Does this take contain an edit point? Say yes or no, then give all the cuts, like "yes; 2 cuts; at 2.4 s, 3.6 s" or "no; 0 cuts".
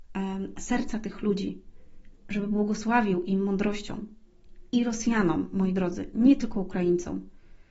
no; 0 cuts